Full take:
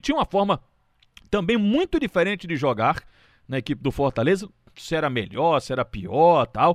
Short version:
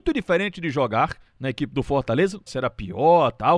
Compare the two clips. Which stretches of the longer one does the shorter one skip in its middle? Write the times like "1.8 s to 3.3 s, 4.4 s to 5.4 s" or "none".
3.1 s to 3.4 s, 4.5 s to 5.6 s